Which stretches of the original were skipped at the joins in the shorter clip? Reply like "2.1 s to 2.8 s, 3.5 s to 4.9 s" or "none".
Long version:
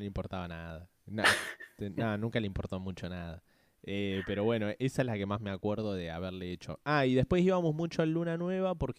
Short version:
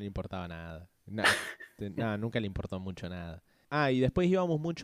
3.6 s to 6.8 s